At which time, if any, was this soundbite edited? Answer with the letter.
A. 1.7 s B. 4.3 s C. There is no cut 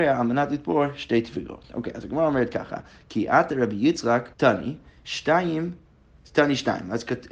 B